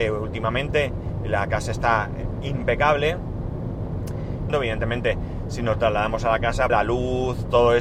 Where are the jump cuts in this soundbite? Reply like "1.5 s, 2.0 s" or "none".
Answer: 4.5 s, 6.7 s